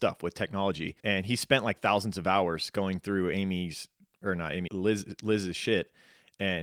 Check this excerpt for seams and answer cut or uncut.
cut